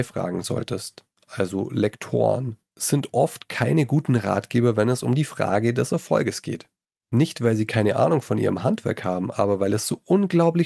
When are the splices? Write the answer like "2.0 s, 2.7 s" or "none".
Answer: 2.7 s